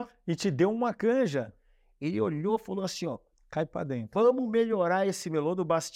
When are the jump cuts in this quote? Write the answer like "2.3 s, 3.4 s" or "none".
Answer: none